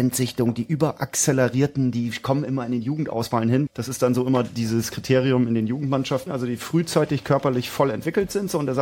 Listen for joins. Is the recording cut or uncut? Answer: cut